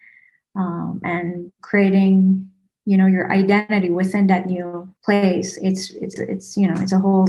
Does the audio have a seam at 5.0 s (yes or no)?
yes